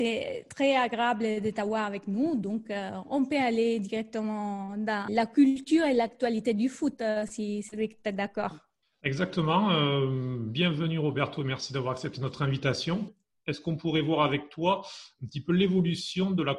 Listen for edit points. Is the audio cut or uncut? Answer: uncut